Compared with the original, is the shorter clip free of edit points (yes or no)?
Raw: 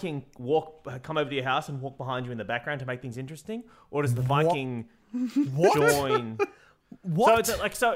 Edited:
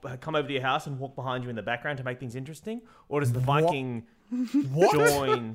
yes